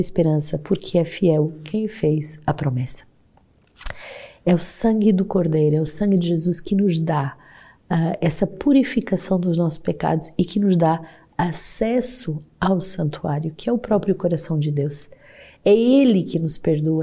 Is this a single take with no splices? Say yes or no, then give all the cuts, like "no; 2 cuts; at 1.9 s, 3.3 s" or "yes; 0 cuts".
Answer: yes; 0 cuts